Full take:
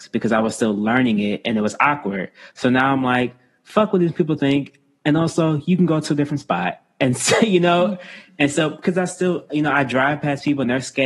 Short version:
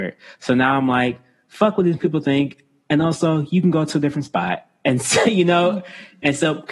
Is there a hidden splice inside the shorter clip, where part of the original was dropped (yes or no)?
no